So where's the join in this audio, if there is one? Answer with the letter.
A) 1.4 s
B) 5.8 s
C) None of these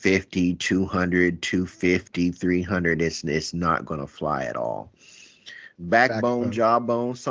B